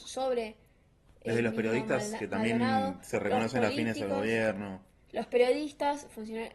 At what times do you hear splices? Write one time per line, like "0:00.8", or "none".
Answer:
none